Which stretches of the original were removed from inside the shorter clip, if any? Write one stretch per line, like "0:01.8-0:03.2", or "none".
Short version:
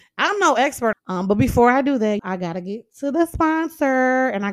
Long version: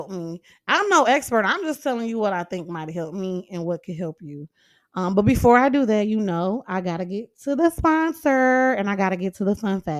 0:01.4-0:04.8
0:06.1-0:06.6